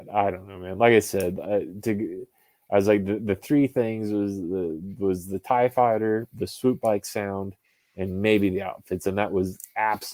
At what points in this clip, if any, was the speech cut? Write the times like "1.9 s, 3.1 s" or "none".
none